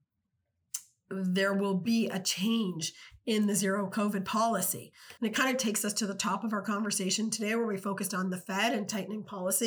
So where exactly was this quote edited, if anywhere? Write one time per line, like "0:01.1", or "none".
0:05.2